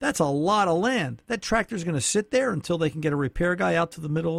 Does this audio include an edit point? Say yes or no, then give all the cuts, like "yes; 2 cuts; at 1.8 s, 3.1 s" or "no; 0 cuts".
no; 0 cuts